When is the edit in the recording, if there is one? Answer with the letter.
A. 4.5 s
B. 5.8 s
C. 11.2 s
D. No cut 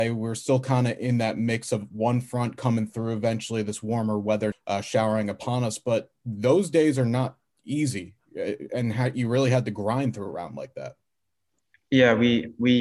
A